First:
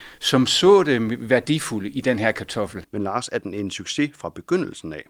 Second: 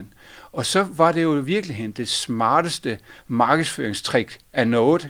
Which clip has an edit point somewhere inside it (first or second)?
first